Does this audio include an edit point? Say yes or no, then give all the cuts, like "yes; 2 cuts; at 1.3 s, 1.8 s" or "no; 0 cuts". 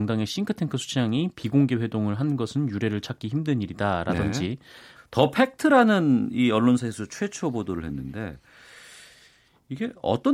yes; 1 cut; at 5.0 s